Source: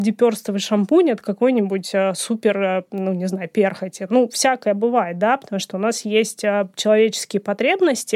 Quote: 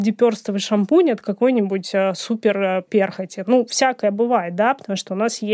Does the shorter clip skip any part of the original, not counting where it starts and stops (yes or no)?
yes